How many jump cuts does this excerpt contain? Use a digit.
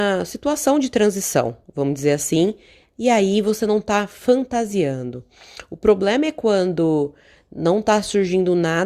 0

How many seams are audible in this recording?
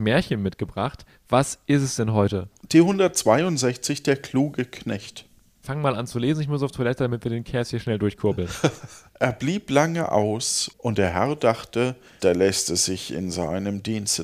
3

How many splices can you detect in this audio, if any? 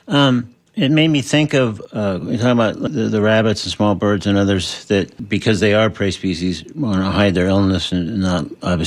0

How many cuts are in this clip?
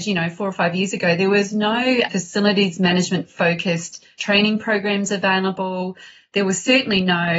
0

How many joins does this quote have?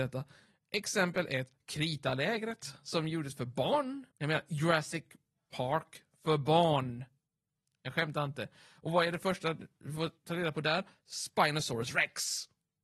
1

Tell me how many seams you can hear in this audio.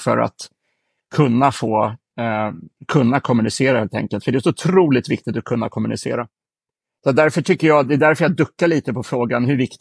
0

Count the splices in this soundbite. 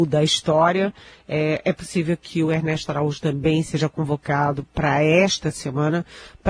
0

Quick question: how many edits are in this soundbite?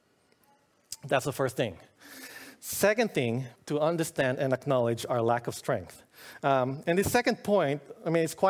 1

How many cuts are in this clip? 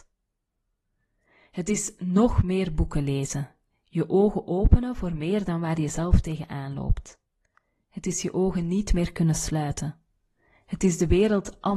0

